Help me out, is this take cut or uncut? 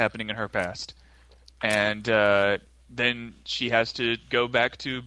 uncut